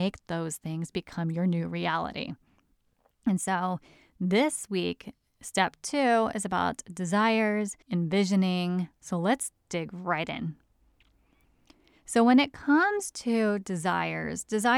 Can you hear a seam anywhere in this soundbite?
yes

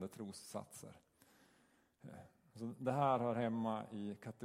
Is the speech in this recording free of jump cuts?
no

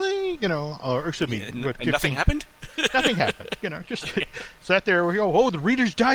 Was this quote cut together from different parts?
no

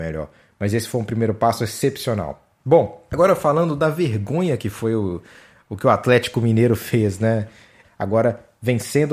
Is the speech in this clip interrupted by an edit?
yes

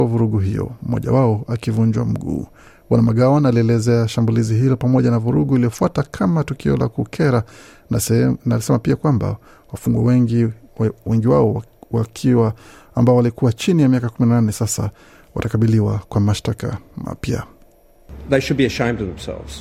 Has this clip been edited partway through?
no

